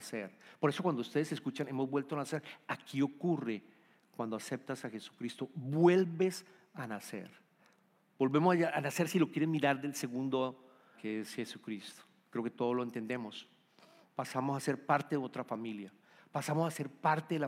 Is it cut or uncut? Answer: cut